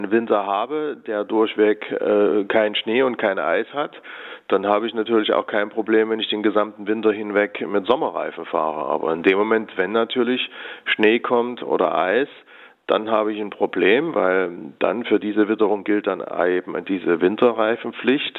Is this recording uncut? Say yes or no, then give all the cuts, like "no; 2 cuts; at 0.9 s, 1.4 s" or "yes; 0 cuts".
yes; 0 cuts